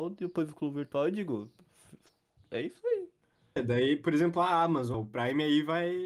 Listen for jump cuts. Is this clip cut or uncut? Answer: cut